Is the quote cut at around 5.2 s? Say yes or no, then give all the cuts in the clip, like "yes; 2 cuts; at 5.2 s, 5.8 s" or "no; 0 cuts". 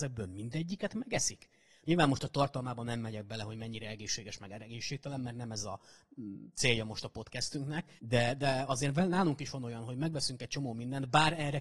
no; 2 cuts; at 1.8 s, 8.0 s